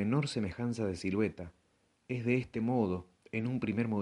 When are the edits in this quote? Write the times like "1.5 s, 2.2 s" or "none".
none